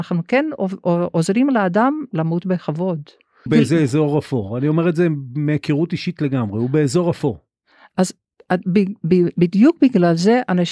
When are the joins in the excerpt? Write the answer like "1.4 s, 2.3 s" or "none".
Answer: 3.5 s